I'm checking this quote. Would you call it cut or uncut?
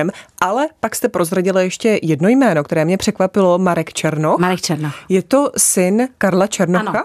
uncut